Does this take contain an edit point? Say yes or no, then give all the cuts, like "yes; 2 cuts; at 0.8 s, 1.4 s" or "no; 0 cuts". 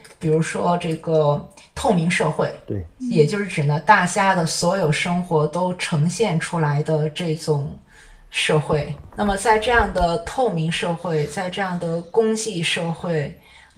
no; 0 cuts